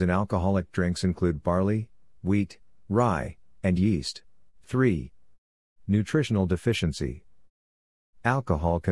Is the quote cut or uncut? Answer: cut